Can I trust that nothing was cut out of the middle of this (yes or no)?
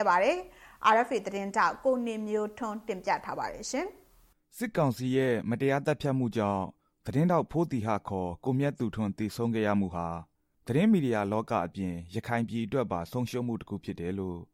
yes